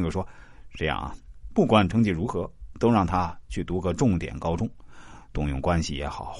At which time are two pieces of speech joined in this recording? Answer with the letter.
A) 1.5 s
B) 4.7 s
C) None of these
A